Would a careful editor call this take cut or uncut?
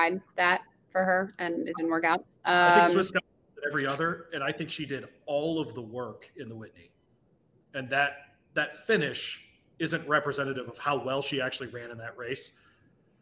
uncut